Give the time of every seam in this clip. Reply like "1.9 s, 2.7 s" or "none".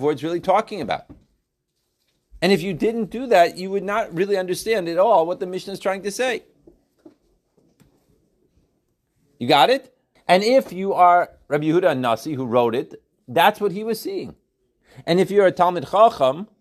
10.2 s